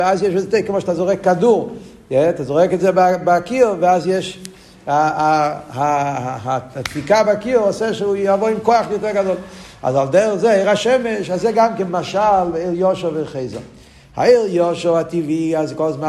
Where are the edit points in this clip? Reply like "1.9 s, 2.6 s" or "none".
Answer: none